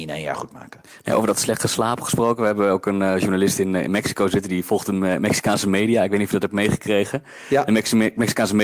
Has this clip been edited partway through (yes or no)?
no